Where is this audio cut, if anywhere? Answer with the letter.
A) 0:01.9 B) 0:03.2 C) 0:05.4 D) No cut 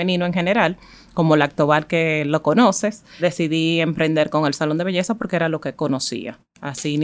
B